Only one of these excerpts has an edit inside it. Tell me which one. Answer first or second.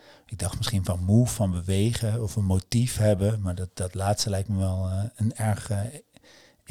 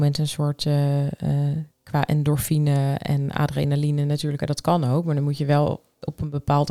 second